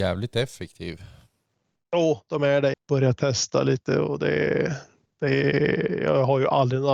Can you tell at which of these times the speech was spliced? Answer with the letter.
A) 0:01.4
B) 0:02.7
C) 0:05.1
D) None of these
B